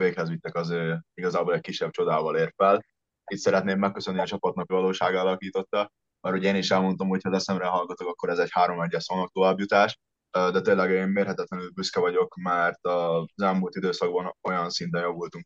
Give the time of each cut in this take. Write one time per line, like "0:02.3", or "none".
0:04.7